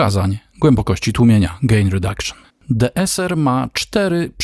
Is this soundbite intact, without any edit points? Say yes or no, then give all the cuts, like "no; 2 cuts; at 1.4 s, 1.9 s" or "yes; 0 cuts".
no; 1 cut; at 2.5 s